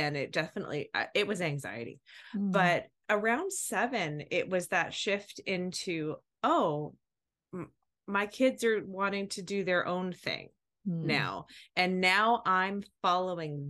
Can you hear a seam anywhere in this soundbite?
no; 0 cuts

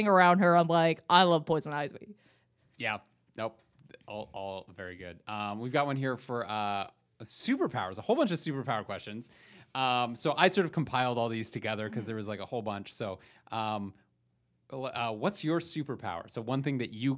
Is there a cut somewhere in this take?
no; 0 cuts

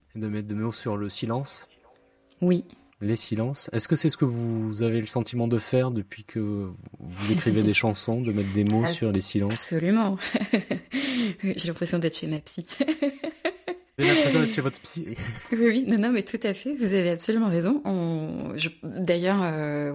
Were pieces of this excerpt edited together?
no; 0 cuts

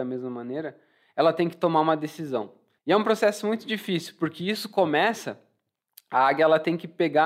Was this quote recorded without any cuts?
no; 1 cut; at 2.8 s

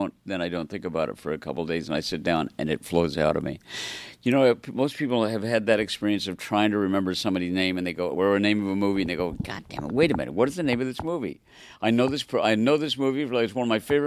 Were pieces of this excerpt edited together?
no; 0 cuts

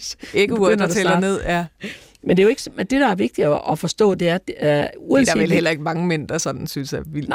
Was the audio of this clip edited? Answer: no; 0 cuts

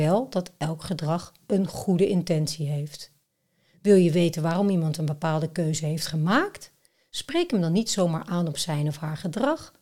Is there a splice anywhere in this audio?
no; 0 cuts

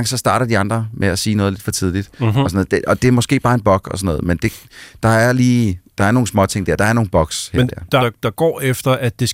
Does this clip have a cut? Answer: yes; 1 cut; at 8.0 s

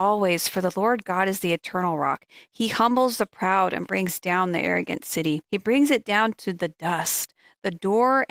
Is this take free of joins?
no; 1 cut; at 5.4 s

